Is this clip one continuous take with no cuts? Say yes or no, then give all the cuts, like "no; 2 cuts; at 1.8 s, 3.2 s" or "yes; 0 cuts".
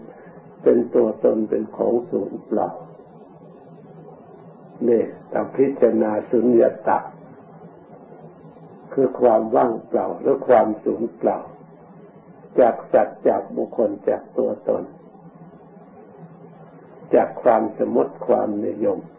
no; 1 cut; at 13.7 s